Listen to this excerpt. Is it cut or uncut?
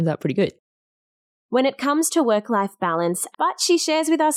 cut